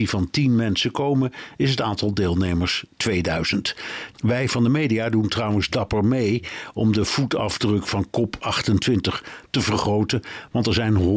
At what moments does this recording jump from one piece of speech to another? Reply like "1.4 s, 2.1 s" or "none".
4.1 s